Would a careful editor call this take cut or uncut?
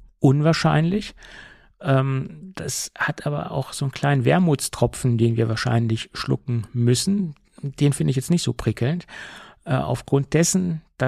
uncut